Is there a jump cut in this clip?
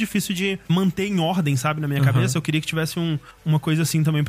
no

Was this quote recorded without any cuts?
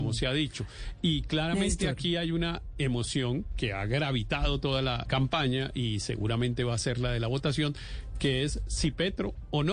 no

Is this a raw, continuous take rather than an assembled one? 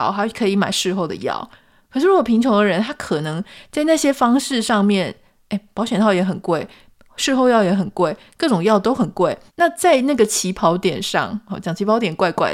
no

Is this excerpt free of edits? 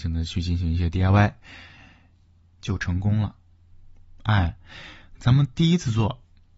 no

